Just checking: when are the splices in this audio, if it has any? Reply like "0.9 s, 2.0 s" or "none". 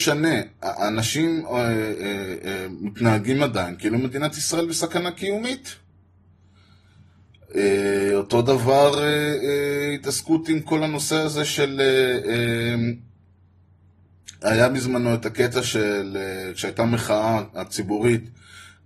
none